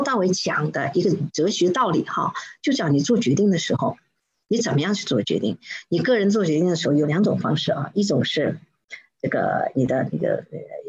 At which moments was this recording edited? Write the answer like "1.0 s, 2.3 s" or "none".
7.0 s

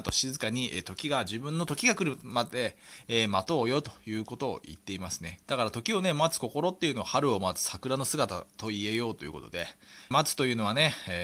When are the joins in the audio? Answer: 5.4 s, 10.1 s

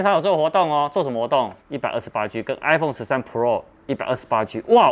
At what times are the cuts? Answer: 1.6 s

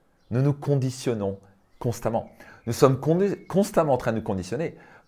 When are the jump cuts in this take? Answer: none

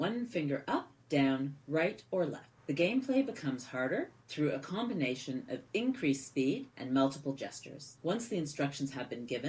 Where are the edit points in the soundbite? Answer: 2.5 s

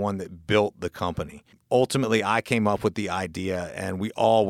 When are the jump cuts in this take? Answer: none

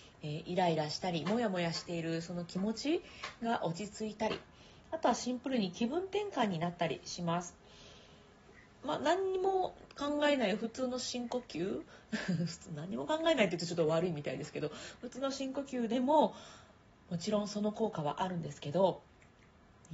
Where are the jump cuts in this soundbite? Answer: none

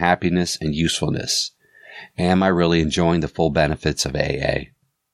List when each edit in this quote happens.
none

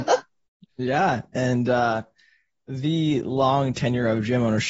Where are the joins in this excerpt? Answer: none

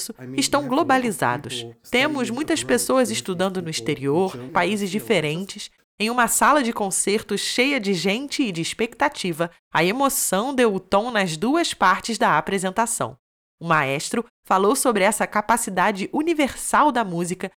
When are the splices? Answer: 4.5 s, 5.8 s

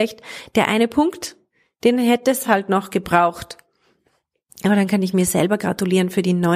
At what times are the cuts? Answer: none

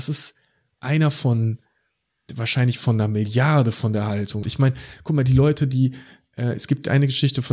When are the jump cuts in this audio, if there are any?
4.4 s

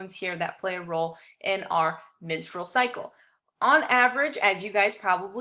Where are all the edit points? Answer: none

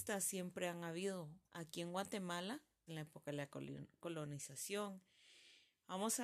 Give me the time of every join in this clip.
1.5 s, 2.9 s

